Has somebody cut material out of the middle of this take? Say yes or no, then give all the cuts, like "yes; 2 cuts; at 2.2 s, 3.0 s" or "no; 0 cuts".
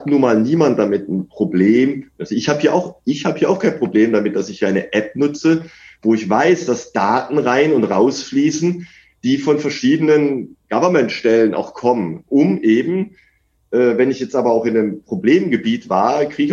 no; 0 cuts